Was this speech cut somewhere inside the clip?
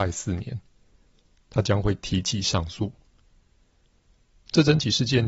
yes; 1 cut; at 1.4 s

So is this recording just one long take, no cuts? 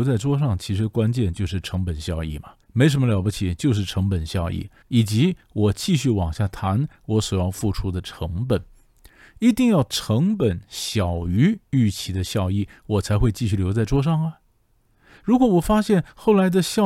no; 2 cuts; at 2.6 s, 4.8 s

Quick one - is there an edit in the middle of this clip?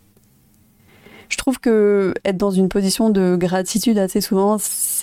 no; 0 cuts

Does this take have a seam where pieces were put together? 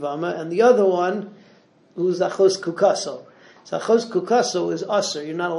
no; 0 cuts

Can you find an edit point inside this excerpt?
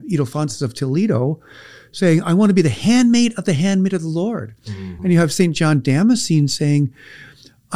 no; 0 cuts

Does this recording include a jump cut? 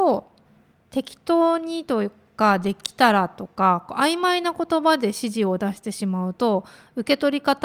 no; 0 cuts

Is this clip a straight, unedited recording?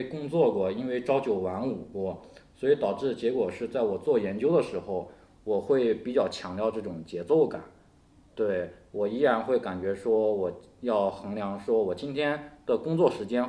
yes; 0 cuts

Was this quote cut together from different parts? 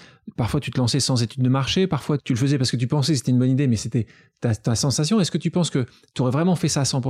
yes; 1 cut; at 2.2 s

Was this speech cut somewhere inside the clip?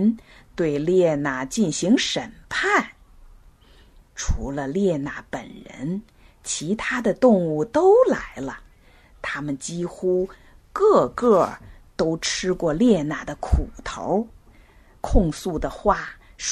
no; 0 cuts

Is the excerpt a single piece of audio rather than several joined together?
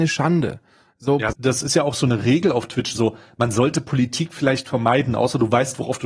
no; 2 cuts; at 1.3 s, 2.9 s

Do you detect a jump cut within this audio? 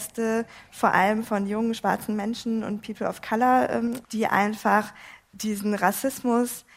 yes; 1 cut; at 4.0 s

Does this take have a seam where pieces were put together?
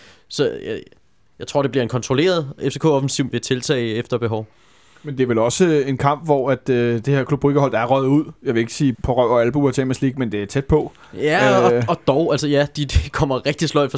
yes; 2 cuts; at 3.3 s, 8.9 s

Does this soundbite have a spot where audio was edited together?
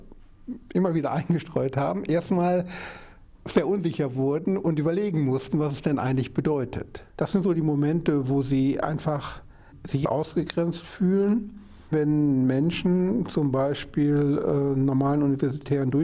yes; 1 cut; at 7.1 s

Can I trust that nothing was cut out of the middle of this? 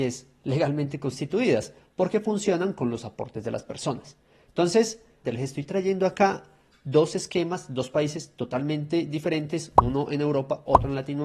no; 1 cut; at 5.2 s

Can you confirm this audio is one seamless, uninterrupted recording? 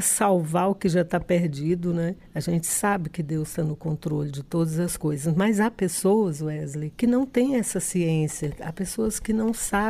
yes; 0 cuts

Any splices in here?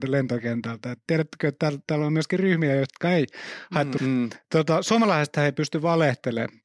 yes; 1 cut; at 4.0 s

